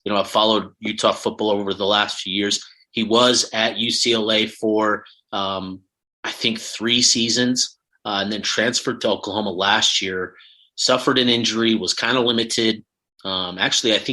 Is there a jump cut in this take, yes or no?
no